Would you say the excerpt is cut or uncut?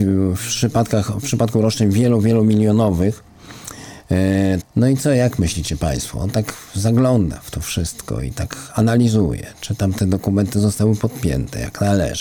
cut